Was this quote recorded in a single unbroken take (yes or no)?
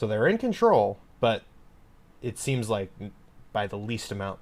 yes